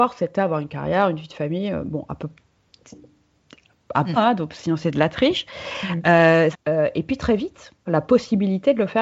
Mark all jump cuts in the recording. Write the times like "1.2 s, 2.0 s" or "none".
4.2 s, 6.5 s, 7.9 s